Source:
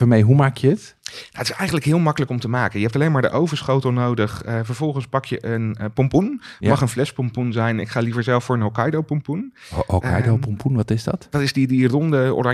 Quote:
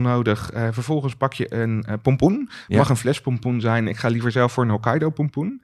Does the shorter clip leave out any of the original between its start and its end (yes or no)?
no